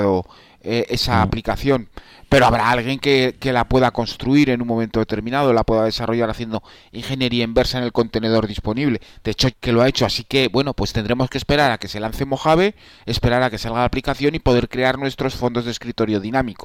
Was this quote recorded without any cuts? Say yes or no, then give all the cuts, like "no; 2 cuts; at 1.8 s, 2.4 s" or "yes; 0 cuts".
no; 1 cut; at 9.5 s